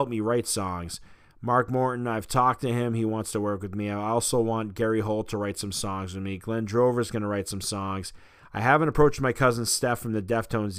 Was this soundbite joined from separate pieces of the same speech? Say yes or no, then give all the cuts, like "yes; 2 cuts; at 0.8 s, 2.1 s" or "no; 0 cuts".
no; 0 cuts